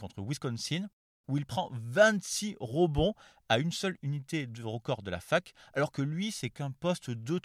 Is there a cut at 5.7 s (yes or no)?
no